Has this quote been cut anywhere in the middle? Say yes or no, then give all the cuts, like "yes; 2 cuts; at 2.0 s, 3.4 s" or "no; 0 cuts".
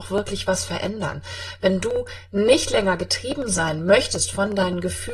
no; 0 cuts